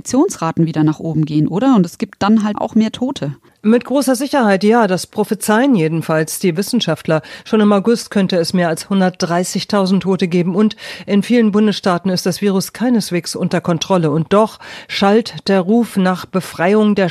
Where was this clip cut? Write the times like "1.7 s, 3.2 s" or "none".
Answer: 2.5 s